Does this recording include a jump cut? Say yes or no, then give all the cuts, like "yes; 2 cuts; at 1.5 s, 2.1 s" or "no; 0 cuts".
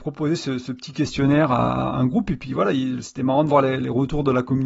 no; 0 cuts